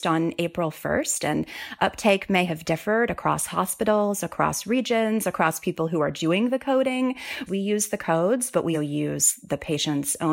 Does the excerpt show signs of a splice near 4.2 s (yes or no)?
no